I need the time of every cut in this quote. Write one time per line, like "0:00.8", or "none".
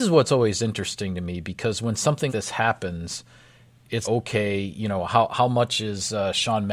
0:02.3
0:04.0